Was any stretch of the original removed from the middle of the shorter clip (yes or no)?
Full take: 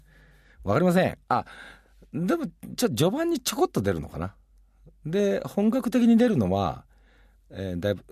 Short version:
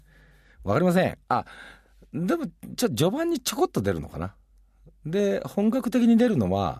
no